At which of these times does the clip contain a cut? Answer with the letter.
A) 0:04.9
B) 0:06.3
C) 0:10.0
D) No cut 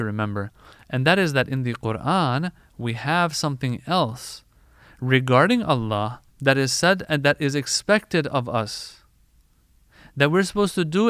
B